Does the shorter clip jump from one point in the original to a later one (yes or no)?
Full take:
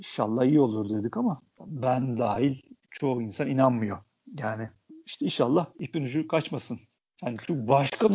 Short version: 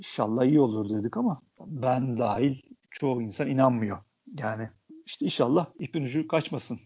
no